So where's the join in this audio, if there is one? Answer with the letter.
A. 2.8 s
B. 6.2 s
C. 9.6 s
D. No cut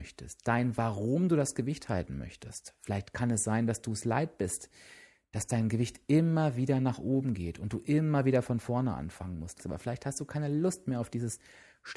C